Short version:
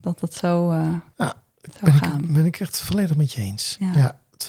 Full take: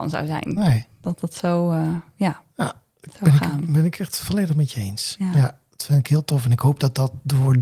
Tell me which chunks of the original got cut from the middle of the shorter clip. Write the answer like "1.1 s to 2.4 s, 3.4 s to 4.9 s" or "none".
2.1 s to 2.5 s